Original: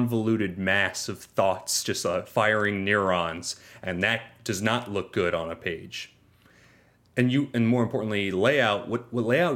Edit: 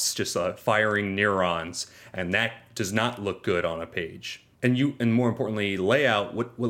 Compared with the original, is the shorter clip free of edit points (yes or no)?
no